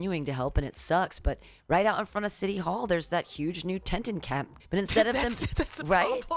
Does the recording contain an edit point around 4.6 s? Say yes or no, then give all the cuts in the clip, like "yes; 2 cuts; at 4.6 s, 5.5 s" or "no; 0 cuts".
yes; 1 cut; at 4.6 s